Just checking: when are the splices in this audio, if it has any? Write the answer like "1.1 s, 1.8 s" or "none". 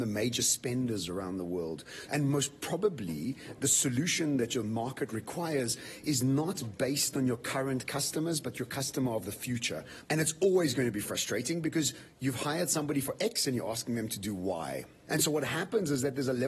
2.1 s, 10.0 s, 15.1 s